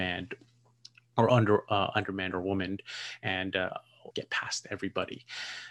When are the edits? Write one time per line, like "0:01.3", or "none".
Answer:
0:04.1